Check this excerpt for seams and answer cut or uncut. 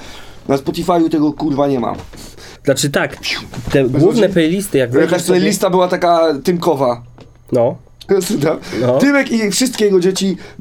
cut